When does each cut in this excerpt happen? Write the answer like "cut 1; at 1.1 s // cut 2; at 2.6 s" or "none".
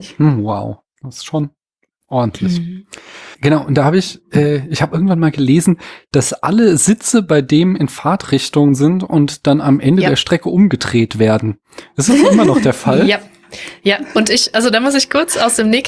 none